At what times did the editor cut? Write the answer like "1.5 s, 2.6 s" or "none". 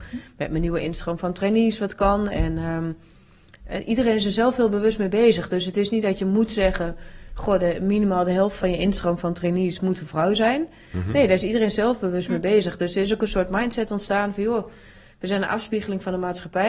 none